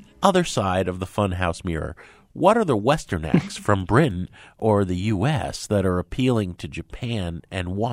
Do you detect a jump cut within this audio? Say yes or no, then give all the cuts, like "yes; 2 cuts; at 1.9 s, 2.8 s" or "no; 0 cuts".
no; 0 cuts